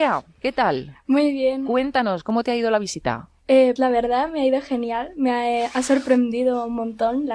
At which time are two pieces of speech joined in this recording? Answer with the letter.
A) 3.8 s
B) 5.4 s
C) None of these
A